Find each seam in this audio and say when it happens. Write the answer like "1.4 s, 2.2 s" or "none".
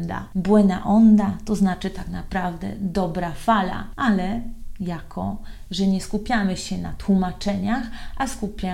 none